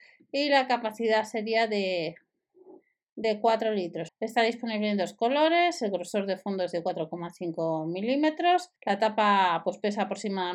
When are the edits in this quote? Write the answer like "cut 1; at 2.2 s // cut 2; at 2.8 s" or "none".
cut 1; at 4.1 s // cut 2; at 8.8 s